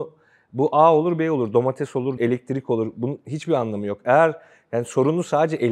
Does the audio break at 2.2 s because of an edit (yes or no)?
yes